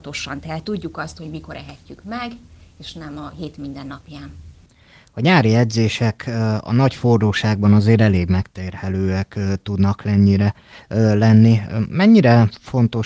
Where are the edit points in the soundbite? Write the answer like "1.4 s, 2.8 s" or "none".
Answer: none